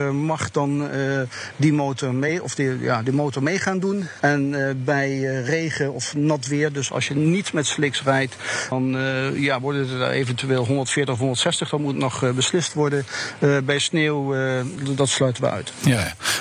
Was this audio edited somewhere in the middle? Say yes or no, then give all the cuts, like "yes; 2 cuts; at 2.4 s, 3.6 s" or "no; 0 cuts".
yes; 2 cuts; at 8.7 s, 14.8 s